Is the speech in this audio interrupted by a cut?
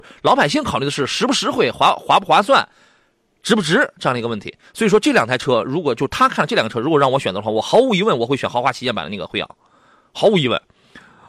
no; 0 cuts

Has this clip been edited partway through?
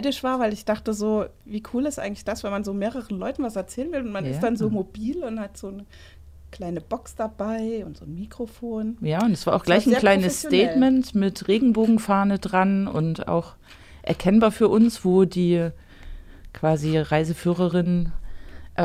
no; 0 cuts

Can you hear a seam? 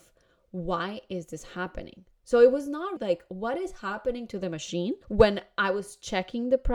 yes; 2 cuts; at 3.0 s, 5.0 s

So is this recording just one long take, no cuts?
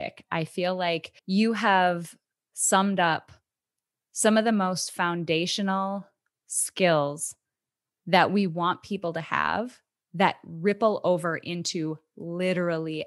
no; 1 cut; at 1.2 s

